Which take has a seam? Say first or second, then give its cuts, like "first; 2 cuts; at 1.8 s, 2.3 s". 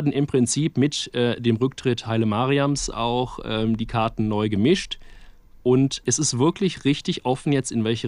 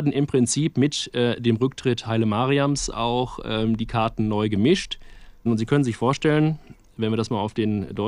second; 1 cut; at 5.5 s